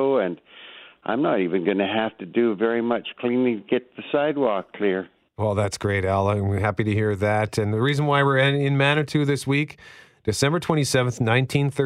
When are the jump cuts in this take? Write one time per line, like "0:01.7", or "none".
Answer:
none

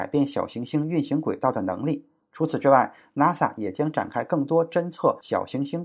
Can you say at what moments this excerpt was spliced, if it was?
none

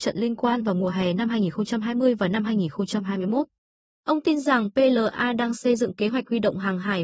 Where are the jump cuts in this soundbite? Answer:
none

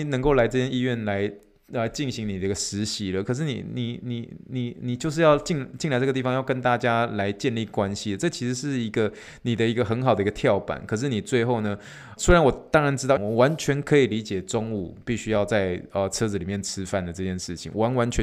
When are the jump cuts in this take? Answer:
0:12.2
0:13.2

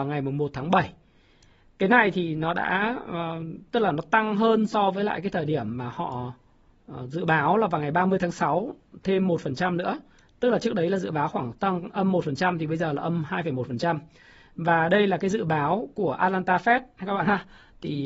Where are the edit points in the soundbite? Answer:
none

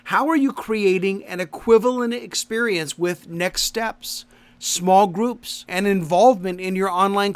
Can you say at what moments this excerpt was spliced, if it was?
0:05.7

